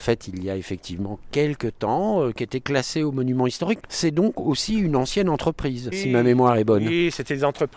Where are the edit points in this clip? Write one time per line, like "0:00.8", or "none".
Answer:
0:03.8
0:05.9